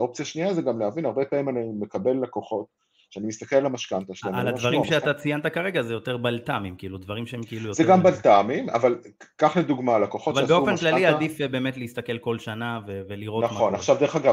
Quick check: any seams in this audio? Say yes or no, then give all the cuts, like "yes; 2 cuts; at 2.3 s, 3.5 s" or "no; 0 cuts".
no; 0 cuts